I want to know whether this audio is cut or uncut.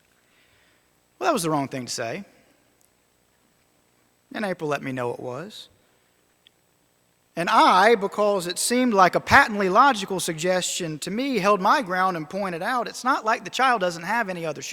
uncut